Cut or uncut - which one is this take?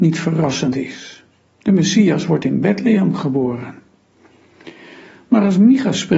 uncut